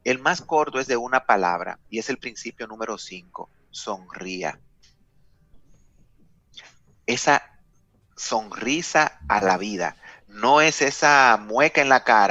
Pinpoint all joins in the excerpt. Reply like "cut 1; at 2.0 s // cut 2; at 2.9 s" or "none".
none